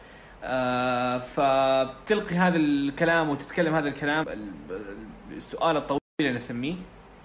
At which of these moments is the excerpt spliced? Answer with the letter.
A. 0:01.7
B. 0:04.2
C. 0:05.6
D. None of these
B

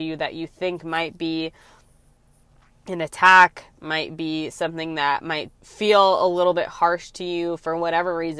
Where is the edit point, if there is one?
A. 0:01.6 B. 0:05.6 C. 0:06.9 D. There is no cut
B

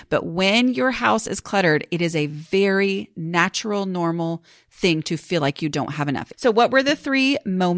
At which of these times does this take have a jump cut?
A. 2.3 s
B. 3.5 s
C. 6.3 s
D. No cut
C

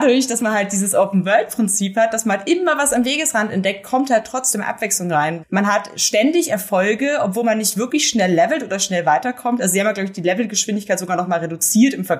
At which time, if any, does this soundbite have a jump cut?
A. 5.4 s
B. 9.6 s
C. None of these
A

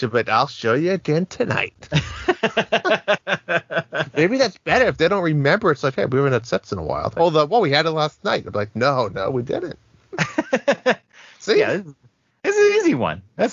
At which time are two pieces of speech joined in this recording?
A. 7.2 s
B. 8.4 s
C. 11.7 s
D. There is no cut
A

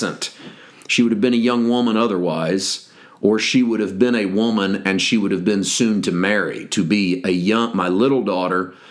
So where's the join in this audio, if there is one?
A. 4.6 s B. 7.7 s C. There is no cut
C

